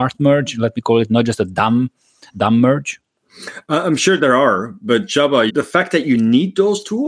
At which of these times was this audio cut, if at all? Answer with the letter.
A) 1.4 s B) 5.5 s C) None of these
B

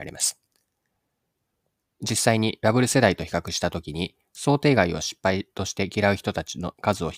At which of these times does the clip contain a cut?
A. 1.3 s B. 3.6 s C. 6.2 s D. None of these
D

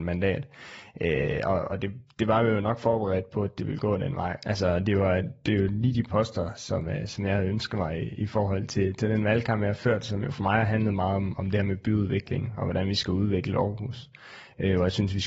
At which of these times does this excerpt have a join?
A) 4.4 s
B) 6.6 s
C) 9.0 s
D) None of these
A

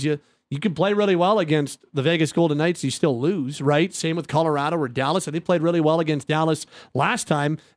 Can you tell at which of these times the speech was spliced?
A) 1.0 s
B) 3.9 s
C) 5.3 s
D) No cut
D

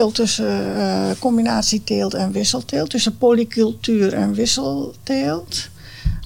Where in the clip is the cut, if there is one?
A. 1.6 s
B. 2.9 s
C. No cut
C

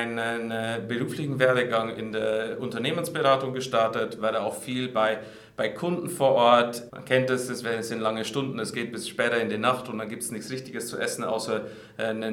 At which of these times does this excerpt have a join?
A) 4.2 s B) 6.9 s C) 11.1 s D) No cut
B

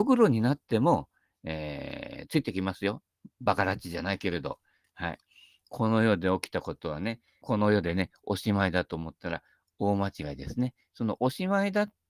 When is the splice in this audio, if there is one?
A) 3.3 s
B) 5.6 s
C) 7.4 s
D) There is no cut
C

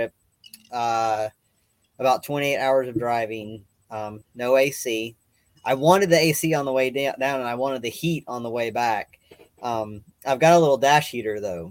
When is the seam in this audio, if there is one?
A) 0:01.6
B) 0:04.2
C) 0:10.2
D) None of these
B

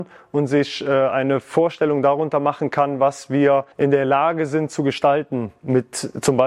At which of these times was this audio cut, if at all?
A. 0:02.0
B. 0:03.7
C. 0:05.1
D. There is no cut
B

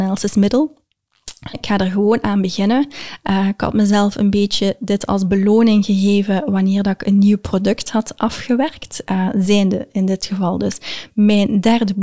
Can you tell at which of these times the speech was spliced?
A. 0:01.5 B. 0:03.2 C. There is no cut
A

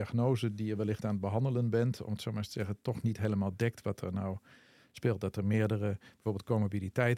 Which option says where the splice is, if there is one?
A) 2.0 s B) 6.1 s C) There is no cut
C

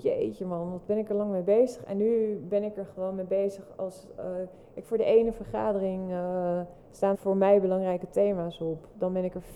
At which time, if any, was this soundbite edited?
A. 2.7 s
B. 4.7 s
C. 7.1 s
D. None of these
C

